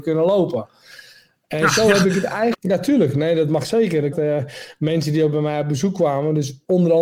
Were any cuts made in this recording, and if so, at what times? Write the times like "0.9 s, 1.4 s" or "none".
2.5 s, 4.1 s